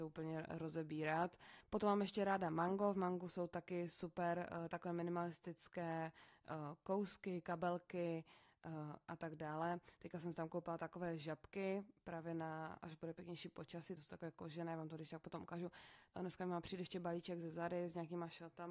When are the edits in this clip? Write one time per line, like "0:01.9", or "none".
0:14.0
0:16.1